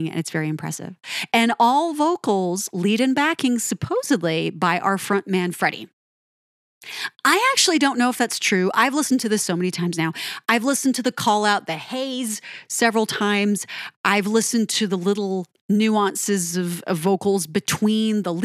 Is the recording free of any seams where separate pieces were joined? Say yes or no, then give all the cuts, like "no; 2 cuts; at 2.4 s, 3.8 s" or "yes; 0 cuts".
yes; 0 cuts